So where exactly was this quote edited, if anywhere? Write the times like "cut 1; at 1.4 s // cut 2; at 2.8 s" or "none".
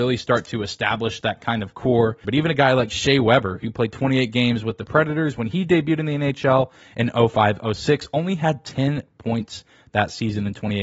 cut 1; at 2.2 s